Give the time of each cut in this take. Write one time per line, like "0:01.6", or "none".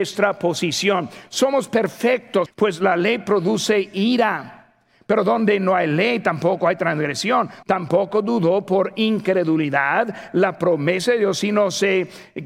0:02.5
0:07.6